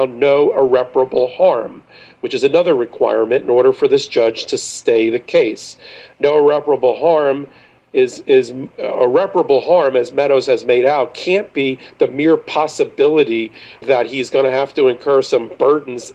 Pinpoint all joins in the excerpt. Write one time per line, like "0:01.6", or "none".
0:08.7
0:13.8